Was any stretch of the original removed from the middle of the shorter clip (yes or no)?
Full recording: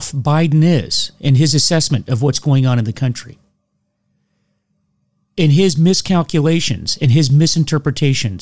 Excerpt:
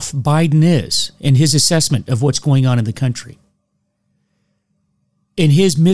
no